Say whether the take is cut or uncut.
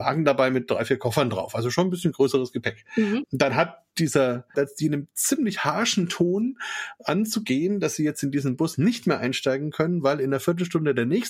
cut